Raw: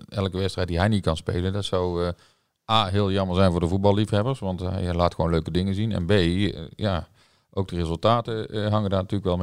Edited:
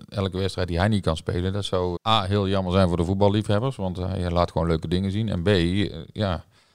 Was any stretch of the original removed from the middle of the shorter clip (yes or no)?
yes